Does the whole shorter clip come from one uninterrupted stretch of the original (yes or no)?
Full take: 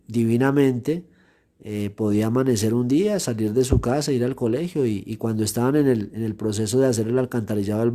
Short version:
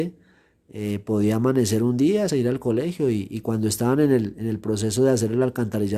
no